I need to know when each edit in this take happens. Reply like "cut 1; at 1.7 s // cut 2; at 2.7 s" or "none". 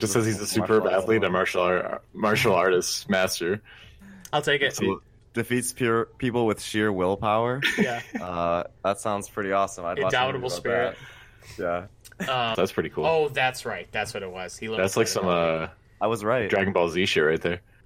cut 1; at 8.8 s // cut 2; at 12.5 s